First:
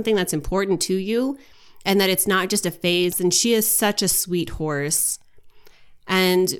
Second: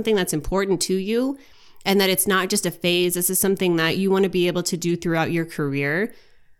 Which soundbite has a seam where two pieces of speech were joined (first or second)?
first